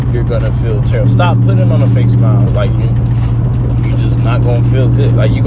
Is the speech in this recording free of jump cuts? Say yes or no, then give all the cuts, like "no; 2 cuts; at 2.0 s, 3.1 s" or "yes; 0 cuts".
no; 2 cuts; at 1.0 s, 2.5 s